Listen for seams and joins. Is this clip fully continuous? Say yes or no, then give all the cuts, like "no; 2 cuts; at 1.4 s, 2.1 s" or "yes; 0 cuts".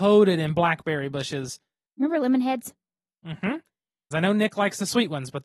no; 2 cuts; at 1.9 s, 4.1 s